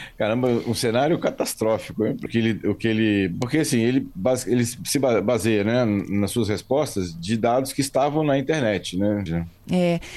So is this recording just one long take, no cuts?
no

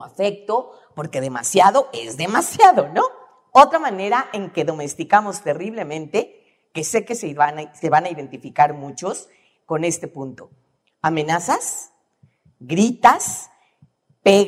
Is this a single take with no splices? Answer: yes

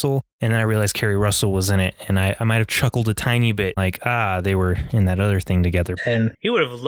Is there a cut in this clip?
yes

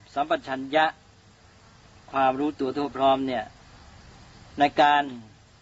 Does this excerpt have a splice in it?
no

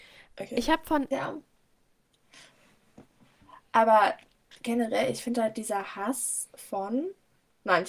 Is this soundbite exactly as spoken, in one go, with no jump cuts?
no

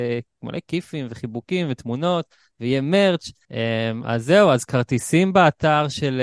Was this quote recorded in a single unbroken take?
no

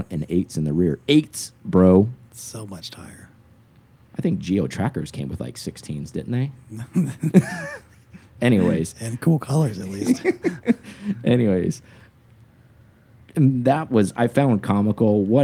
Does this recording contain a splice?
no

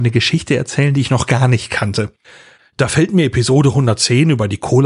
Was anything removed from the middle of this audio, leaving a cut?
no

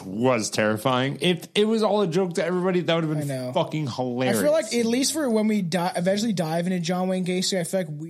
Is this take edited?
no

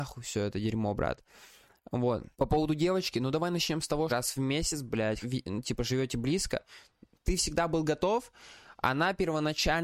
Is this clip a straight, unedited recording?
no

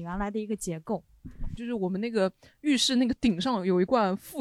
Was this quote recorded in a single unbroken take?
no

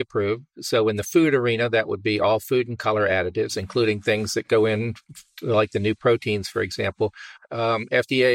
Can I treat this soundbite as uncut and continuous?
no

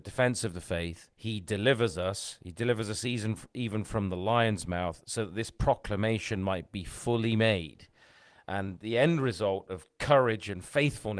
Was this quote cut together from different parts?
yes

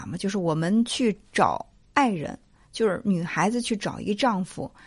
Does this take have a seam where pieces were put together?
no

